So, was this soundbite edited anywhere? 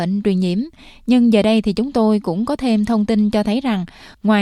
no; 0 cuts

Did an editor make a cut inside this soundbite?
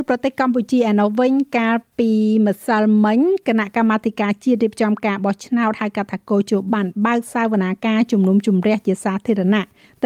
yes; 1 cut; at 6.7 s

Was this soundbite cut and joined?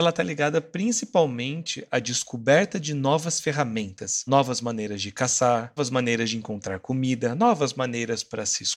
yes; 2 cuts; at 4.3 s, 5.8 s

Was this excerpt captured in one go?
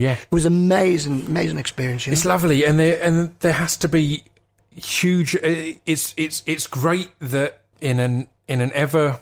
no; 1 cut; at 7.7 s

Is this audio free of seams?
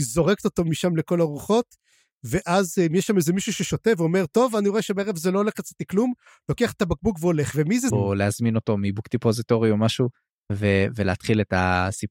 no; 1 cut; at 7.9 s

